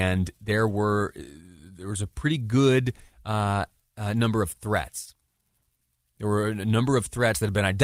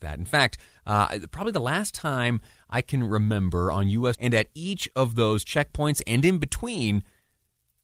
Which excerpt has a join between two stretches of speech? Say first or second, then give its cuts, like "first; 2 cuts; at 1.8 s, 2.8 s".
second; 1 cut; at 4.1 s